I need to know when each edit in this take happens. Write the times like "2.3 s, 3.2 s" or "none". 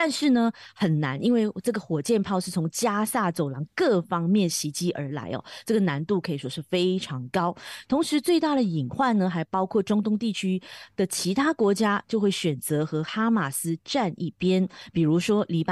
none